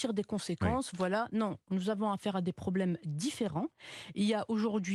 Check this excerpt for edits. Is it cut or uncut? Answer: uncut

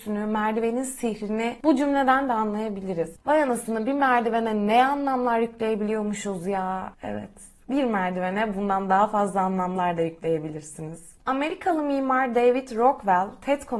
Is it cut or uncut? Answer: cut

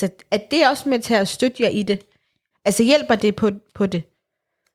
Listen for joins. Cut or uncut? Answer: cut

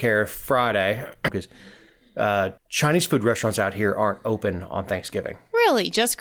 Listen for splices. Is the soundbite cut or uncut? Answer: cut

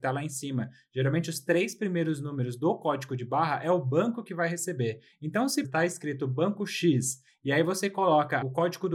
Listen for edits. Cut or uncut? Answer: cut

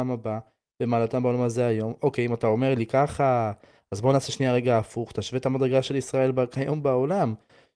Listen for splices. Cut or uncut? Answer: uncut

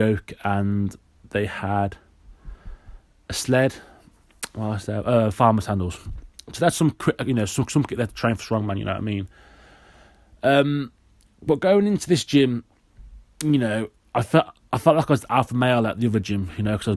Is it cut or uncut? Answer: uncut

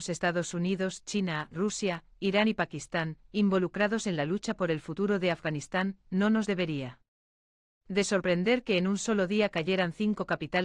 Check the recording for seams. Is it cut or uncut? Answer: uncut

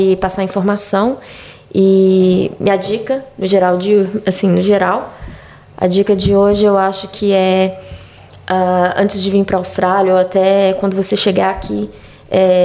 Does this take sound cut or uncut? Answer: uncut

